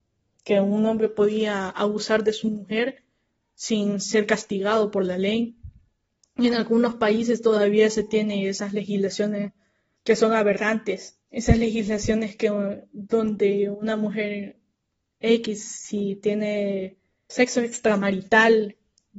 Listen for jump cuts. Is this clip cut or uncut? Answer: cut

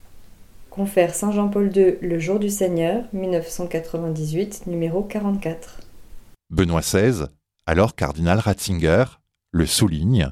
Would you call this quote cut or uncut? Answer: uncut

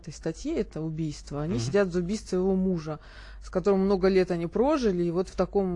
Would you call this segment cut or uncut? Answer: uncut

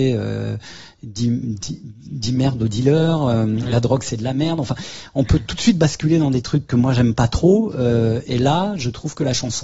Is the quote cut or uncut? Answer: uncut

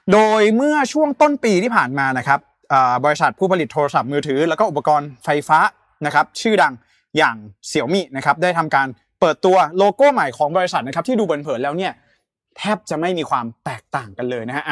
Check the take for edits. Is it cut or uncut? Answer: uncut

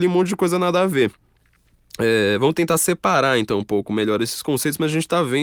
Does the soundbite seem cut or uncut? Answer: uncut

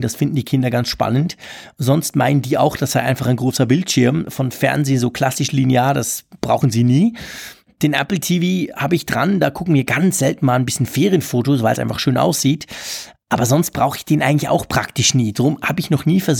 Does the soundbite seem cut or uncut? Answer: uncut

